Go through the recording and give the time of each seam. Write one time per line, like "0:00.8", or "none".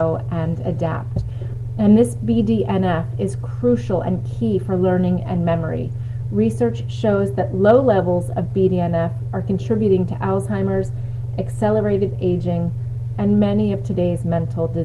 0:13.1